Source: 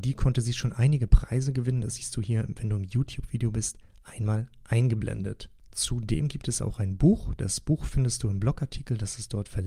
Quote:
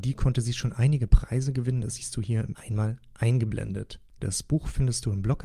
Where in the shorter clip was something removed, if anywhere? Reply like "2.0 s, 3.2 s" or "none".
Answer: 2.5 s, 4.2 s